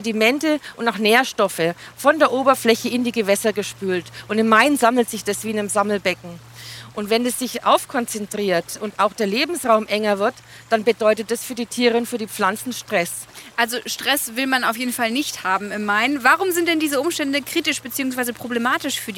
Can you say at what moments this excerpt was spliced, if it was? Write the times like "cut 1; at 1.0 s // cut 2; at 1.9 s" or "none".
cut 1; at 6.9 s